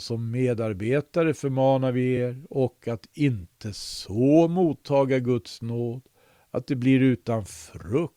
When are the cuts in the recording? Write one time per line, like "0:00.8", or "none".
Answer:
none